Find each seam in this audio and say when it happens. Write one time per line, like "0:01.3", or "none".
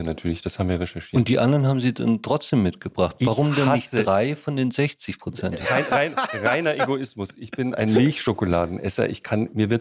none